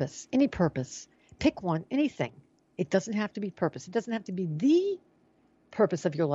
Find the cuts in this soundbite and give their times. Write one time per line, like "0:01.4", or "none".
none